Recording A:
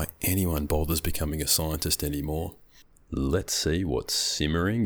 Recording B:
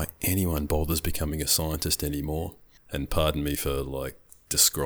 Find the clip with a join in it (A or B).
B